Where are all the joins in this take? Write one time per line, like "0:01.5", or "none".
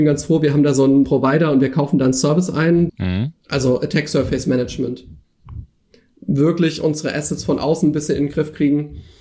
0:01.0
0:02.9

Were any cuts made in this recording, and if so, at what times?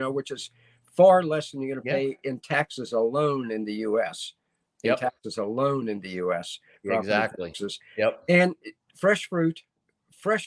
none

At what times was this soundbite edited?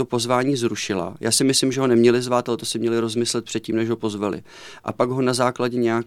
none

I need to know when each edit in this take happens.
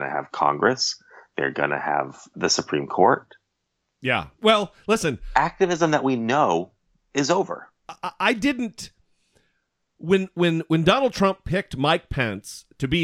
0:02.3

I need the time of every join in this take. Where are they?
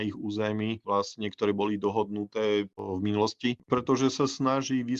0:03.6

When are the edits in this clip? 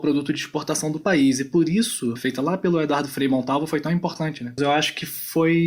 0:02.2
0:04.6

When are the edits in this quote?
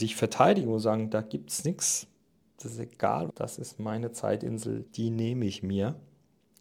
0:03.3
0:04.9

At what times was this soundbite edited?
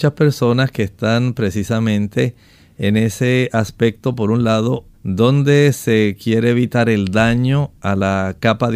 0:04.9

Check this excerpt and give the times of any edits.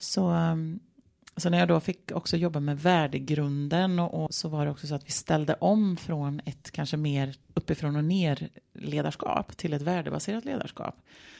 0:04.3
0:07.4

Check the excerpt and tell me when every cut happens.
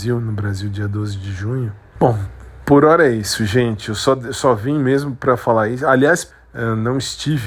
0:02.0
0:06.3

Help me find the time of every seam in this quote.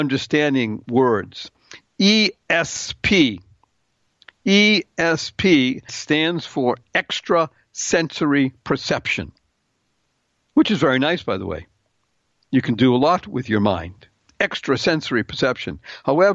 0:05.9

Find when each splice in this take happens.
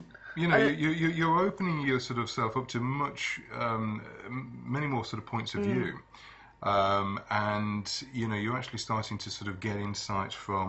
none

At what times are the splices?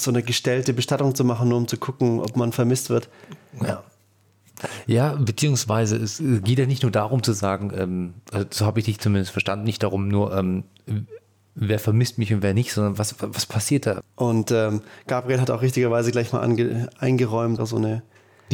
0:14.0
0:17.6

